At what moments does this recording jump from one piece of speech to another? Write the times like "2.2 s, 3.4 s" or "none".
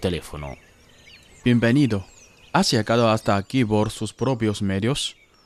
none